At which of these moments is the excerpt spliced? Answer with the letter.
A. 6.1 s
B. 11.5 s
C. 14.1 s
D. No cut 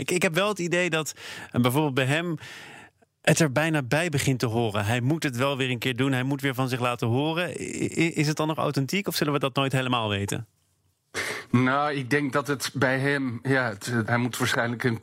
C